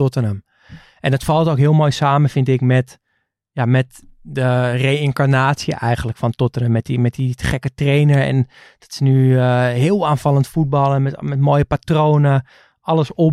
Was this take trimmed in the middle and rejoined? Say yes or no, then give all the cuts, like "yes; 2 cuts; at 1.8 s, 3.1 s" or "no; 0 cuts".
no; 0 cuts